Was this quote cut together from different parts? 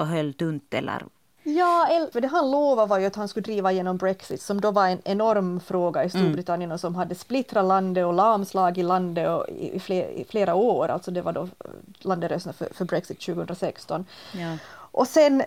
yes; 1 cut; at 2.1 s

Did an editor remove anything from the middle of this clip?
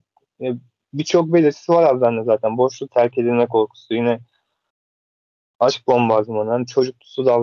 yes; 1 cut; at 2.9 s

